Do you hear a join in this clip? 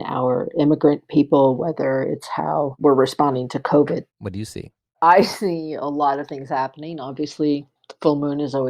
yes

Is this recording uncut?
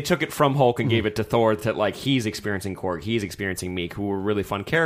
yes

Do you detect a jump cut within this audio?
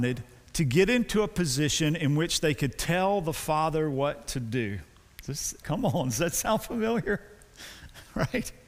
yes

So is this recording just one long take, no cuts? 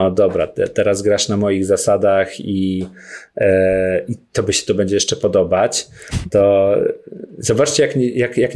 yes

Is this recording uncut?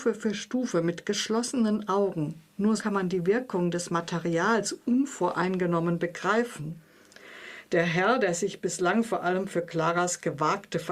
no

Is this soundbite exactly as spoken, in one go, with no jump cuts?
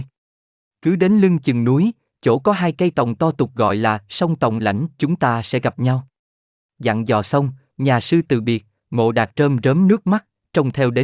yes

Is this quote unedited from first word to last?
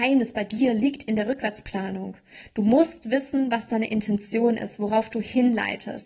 yes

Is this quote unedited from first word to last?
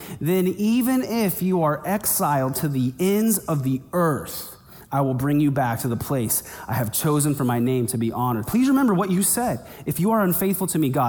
no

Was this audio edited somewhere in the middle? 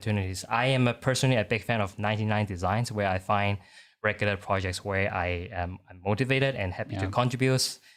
no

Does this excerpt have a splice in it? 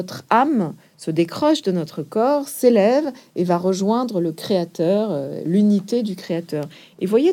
no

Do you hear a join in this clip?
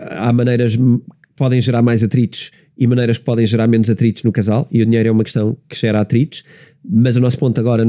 no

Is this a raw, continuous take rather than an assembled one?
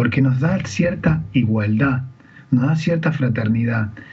yes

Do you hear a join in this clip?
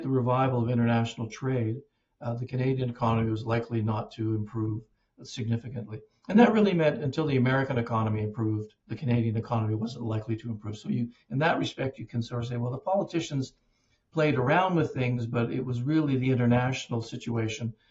yes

